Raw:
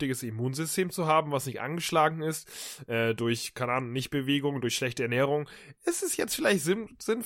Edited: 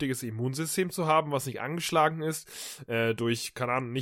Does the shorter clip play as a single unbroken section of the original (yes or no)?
yes